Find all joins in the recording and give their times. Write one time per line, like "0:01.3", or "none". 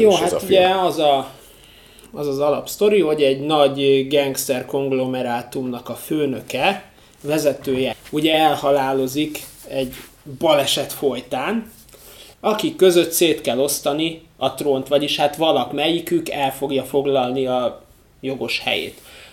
0:02.1
0:07.9
0:12.3